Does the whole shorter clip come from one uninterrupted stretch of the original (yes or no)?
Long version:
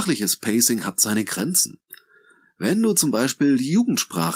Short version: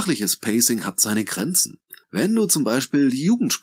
no